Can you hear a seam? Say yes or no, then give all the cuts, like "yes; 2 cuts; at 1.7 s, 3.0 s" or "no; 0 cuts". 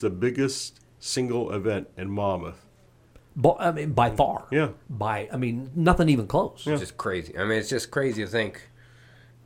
no; 0 cuts